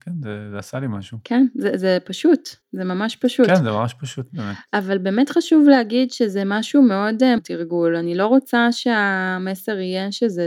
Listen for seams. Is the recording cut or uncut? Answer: cut